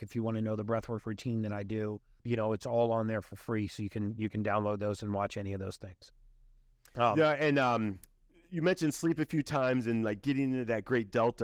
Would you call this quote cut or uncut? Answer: uncut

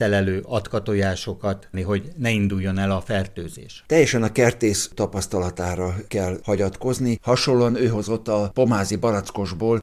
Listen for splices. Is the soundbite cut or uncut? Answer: cut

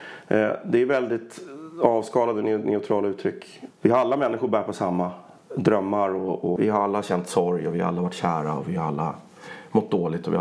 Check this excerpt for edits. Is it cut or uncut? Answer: cut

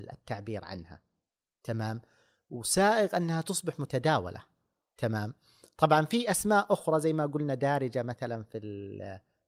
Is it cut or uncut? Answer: uncut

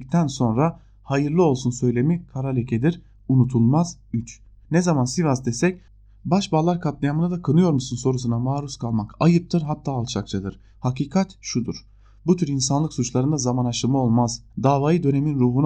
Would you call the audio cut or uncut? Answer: cut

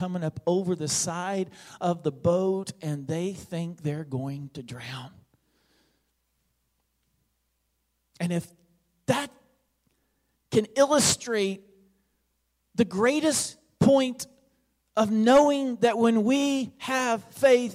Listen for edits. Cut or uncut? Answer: uncut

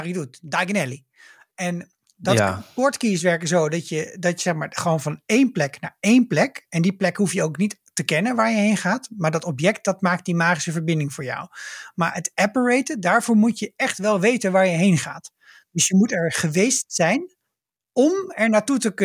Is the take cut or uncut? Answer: uncut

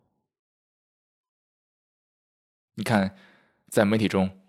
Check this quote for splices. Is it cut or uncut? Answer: cut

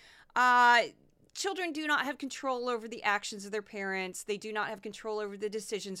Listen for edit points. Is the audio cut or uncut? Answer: uncut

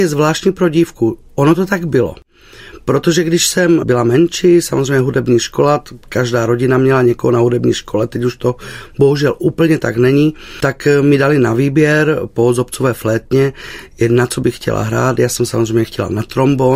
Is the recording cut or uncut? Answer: uncut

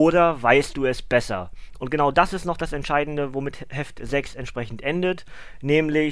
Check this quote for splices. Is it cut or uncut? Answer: cut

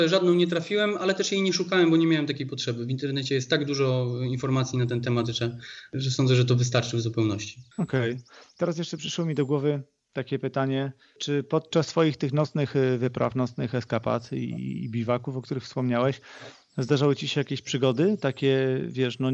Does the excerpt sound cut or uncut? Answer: cut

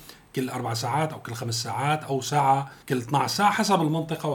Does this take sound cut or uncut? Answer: cut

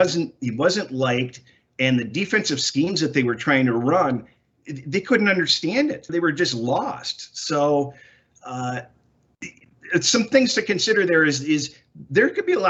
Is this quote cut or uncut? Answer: cut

